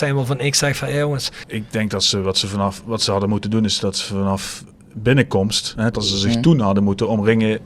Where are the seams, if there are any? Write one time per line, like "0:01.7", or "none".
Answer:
0:01.4
0:05.9